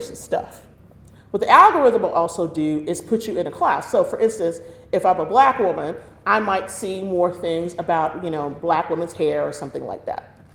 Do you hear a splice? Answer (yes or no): no